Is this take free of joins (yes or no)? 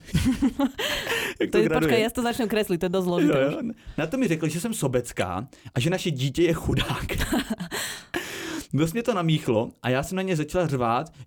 yes